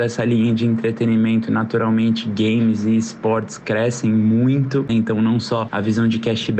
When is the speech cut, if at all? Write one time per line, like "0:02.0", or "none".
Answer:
0:04.9